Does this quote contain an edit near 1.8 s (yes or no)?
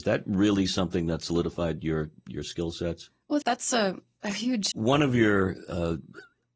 no